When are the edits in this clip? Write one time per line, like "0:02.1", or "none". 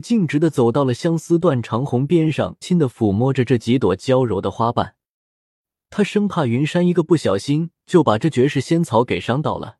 0:02.6
0:05.8